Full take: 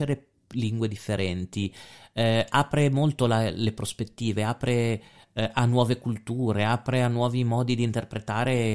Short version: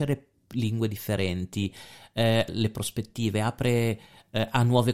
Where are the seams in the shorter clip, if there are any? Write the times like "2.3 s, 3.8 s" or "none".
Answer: 2.5 s